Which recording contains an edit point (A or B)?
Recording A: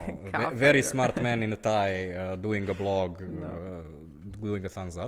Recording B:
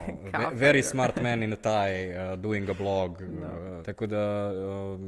B